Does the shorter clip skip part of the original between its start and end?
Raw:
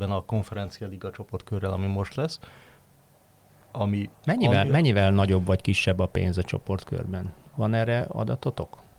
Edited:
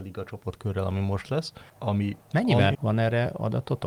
yes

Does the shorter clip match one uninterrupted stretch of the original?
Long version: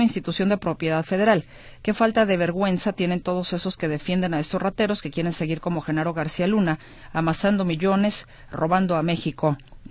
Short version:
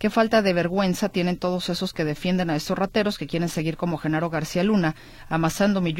yes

